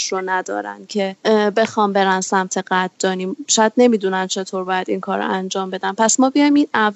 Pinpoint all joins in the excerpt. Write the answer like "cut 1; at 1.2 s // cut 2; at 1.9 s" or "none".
cut 1; at 1.2 s